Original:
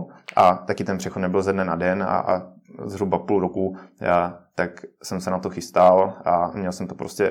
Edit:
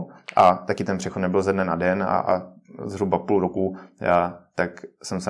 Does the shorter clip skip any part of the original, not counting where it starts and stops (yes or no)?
no